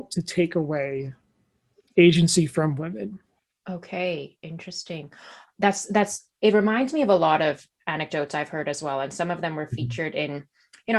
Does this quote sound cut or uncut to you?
uncut